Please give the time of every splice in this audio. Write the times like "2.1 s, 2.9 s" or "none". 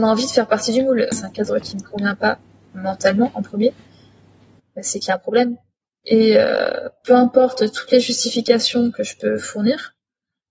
1.1 s